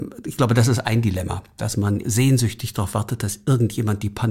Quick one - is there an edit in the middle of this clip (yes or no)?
yes